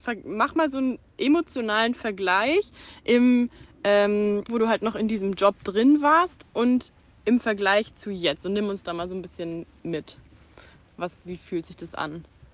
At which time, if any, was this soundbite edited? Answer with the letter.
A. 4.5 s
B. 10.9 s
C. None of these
A